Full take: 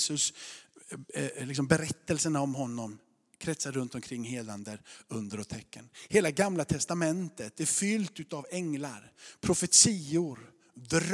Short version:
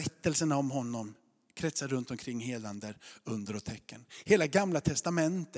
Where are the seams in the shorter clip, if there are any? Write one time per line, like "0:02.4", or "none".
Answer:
none